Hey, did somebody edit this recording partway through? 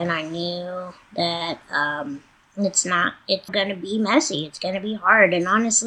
yes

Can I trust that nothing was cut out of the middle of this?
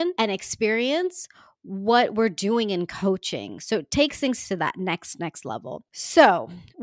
yes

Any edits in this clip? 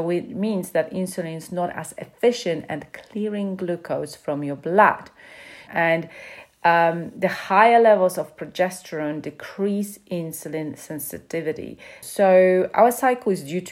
yes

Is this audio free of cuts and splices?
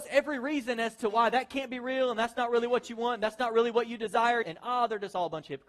no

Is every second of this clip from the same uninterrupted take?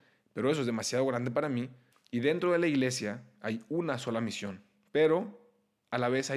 no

